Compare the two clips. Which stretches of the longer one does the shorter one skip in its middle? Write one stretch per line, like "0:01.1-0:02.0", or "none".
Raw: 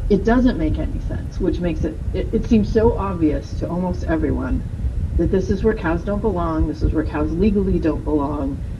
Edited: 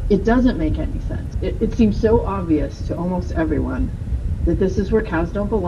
0:01.3-0:02.1

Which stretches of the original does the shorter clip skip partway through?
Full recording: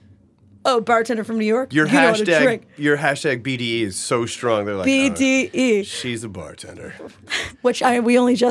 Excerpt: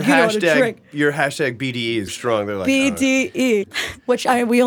0:03.9-0:04.3
0:05.8-0:07.2

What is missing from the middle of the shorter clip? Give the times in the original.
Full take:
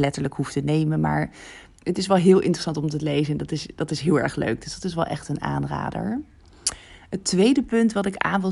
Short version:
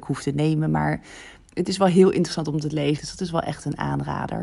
0:03.3-0:04.6

